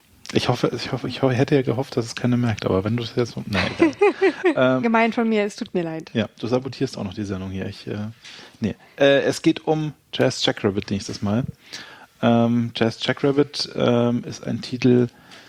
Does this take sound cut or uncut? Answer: cut